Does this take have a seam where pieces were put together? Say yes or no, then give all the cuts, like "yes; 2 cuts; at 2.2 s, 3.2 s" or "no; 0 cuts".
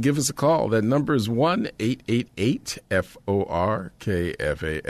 no; 0 cuts